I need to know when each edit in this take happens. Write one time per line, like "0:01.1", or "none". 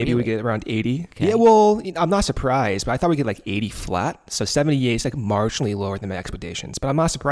none